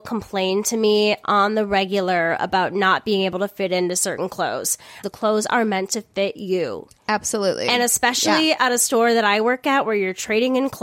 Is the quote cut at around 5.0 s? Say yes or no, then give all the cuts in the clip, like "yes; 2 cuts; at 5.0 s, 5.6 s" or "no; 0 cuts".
yes; 1 cut; at 5.0 s